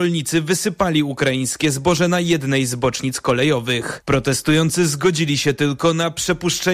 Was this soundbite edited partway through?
yes; 1 cut; at 4.0 s

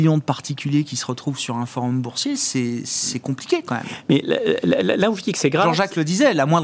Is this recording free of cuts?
yes; 0 cuts

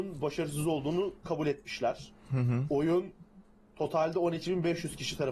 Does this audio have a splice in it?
no; 0 cuts

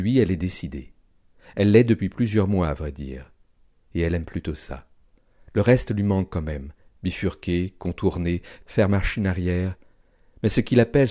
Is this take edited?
no; 0 cuts

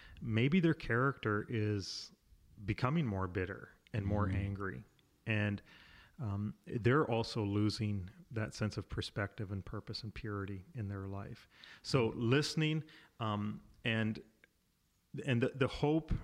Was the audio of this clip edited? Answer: no; 0 cuts

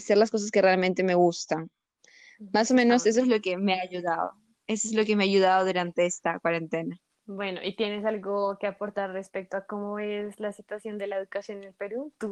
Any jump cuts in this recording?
no; 0 cuts

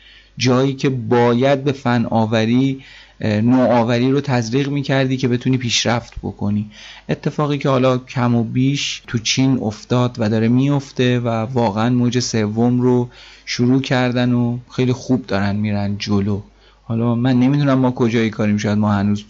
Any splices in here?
no; 0 cuts

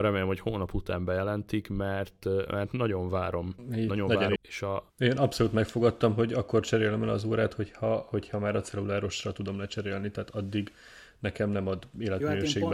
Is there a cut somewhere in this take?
yes; 1 cut; at 4.4 s

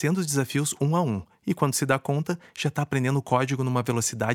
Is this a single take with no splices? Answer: yes; 0 cuts

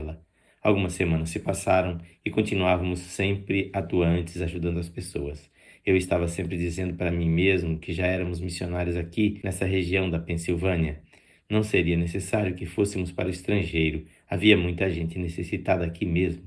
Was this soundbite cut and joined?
no; 0 cuts

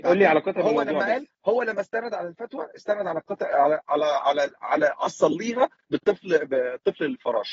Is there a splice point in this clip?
no; 0 cuts

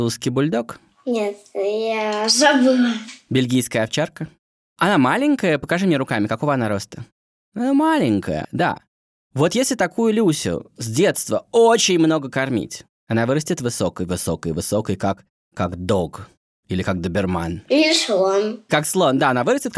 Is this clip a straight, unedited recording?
no; 1 cut; at 8.4 s

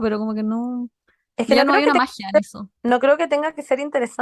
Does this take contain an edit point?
yes; 1 cut; at 2.8 s

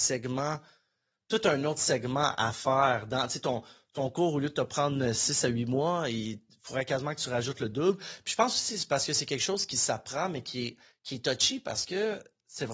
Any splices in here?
no; 0 cuts

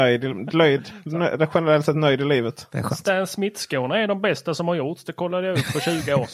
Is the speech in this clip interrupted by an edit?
no; 0 cuts

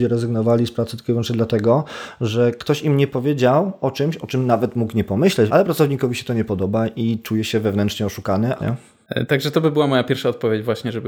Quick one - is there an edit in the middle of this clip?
yes; 2 cuts; at 5.5 s, 8.6 s

